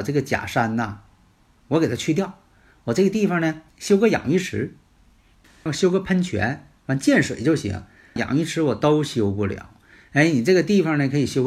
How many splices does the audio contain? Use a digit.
3